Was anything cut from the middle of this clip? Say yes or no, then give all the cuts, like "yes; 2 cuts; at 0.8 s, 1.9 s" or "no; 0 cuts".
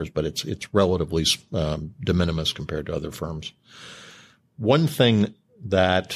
no; 0 cuts